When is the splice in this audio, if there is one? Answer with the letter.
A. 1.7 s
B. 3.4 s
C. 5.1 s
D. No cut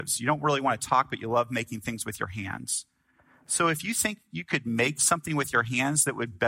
D